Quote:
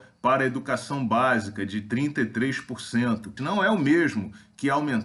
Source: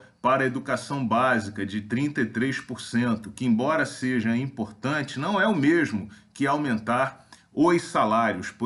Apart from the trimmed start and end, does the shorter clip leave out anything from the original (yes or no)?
yes